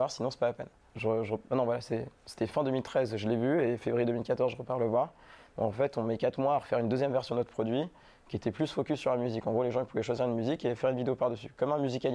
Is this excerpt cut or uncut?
cut